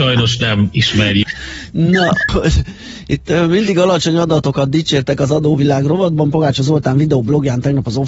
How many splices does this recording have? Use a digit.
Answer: 2